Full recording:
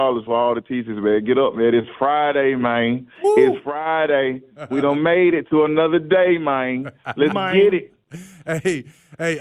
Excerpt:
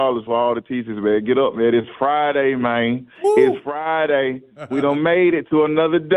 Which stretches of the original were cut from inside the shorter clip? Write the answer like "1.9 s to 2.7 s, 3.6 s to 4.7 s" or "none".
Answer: none